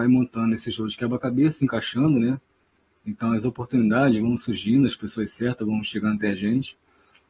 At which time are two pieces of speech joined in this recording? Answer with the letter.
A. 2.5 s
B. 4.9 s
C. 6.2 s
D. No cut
D